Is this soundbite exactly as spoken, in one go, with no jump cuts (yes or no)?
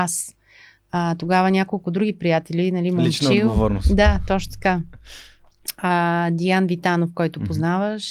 yes